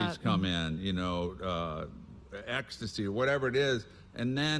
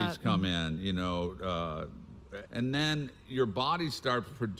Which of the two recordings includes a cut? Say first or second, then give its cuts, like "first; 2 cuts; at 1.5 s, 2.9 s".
second; 1 cut; at 2.4 s